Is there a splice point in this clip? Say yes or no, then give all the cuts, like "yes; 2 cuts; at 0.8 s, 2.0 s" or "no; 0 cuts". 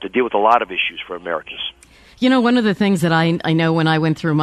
no; 0 cuts